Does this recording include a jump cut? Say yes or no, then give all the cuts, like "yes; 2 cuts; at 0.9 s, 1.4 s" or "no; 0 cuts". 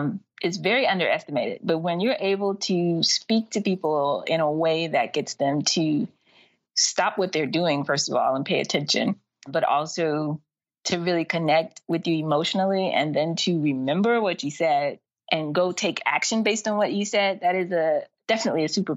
yes; 1 cut; at 9.5 s